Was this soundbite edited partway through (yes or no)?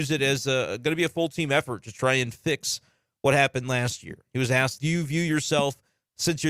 yes